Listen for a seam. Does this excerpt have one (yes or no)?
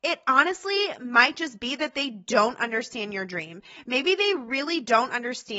no